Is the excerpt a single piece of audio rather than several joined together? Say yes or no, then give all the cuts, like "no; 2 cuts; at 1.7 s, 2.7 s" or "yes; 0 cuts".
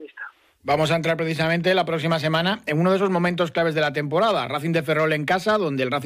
yes; 0 cuts